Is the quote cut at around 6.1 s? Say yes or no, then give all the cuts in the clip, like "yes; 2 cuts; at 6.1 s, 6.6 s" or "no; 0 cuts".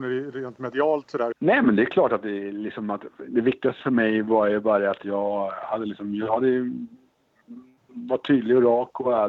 no; 1 cut; at 1.3 s